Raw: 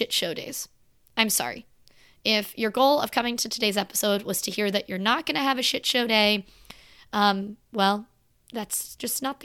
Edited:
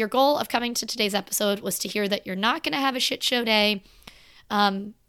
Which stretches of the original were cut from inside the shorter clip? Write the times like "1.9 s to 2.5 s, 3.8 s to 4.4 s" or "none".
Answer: none